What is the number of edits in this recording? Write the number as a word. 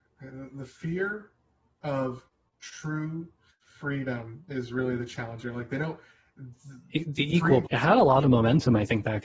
one